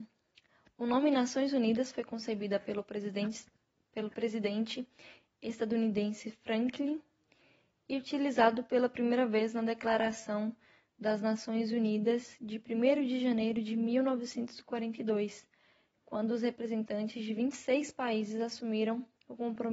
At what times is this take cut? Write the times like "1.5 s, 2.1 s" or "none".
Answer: none